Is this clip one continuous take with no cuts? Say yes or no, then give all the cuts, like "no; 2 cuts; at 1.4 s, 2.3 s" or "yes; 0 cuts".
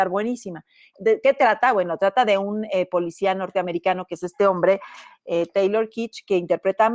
no; 1 cut; at 0.9 s